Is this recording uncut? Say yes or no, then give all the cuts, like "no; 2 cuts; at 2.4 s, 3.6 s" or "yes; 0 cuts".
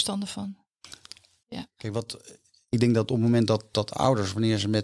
no; 1 cut; at 1.4 s